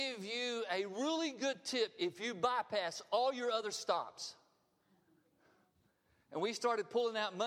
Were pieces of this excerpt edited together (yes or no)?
no